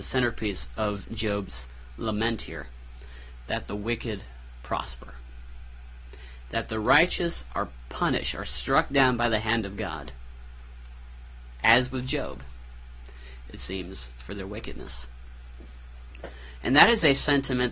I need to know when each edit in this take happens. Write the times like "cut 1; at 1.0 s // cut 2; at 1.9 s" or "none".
cut 1; at 13.5 s